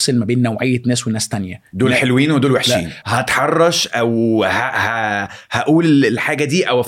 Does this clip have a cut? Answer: yes; 1 cut; at 3.0 s

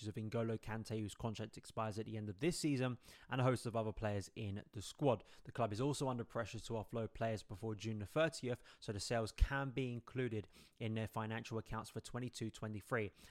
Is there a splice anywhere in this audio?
no; 0 cuts

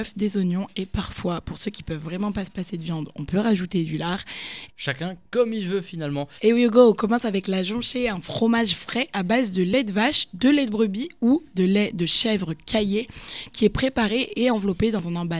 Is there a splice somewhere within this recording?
yes; 2 cuts; at 4.7 s, 6.4 s

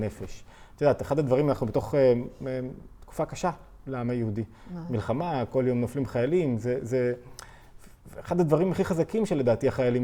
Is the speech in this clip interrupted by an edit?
no; 0 cuts

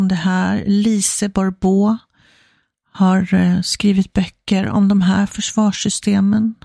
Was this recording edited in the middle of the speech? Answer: no; 0 cuts

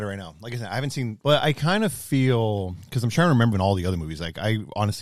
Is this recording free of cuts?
no; 2 cuts; at 1.2 s, 3.5 s

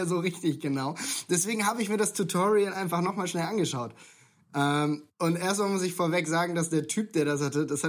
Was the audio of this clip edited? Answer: no; 0 cuts

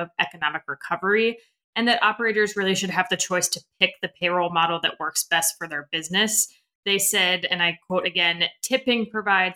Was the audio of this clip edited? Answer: no; 0 cuts

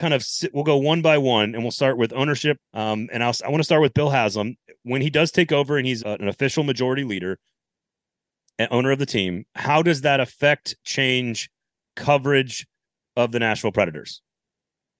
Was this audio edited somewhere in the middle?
yes; 2 cuts; at 2.6 s, 6.0 s

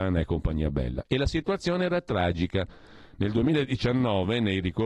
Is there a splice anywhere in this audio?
no; 0 cuts

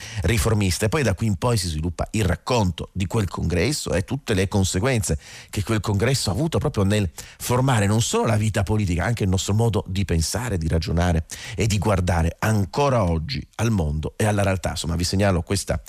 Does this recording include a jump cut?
no; 0 cuts

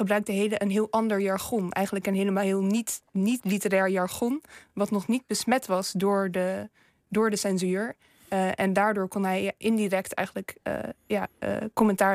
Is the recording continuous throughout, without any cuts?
yes; 0 cuts

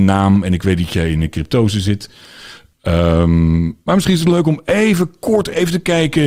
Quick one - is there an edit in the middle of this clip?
no; 0 cuts

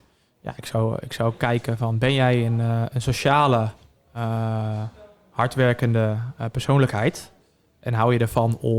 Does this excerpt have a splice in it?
no; 0 cuts

